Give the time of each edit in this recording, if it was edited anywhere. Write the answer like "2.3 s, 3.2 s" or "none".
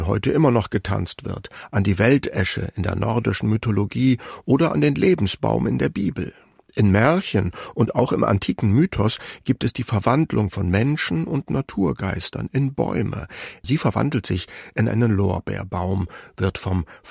13.6 s